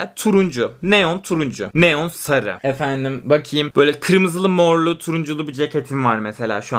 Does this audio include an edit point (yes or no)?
no